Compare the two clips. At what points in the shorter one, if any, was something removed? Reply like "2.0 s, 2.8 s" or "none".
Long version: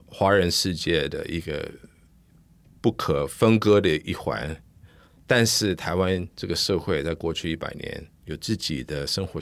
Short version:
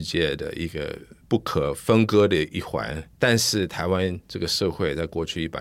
1.2 s, 3.1 s